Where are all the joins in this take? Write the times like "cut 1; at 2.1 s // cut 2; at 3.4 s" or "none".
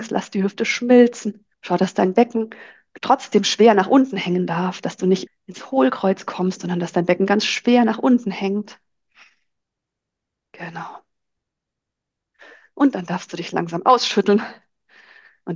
cut 1; at 1.5 s // cut 2; at 5.3 s

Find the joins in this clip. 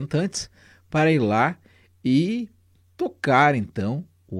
none

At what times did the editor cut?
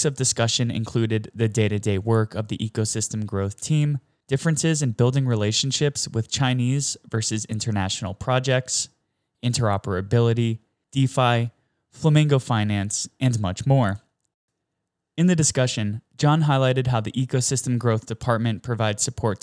cut 1; at 4.2 s // cut 2; at 10.8 s

